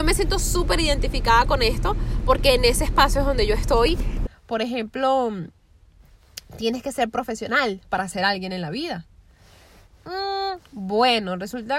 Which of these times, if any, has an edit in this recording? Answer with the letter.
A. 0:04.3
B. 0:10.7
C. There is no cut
A